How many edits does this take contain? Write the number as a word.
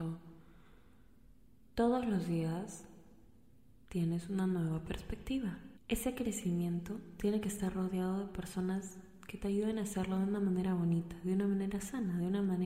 zero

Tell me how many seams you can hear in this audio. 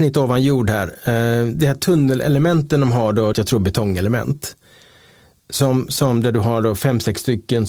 one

